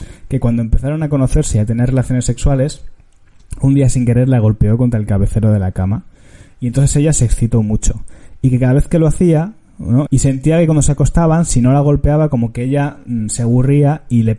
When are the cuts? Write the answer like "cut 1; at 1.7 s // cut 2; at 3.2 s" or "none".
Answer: cut 1; at 10.1 s